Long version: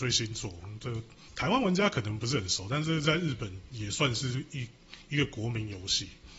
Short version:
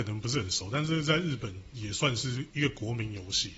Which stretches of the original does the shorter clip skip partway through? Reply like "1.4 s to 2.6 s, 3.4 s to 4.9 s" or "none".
4.5 s to 5.1 s